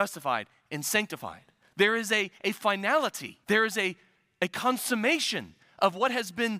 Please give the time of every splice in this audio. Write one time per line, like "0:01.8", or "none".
0:03.4